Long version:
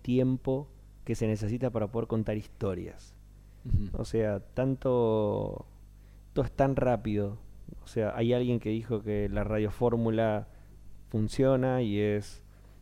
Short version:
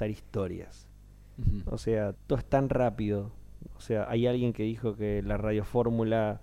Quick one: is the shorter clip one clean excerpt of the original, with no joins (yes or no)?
no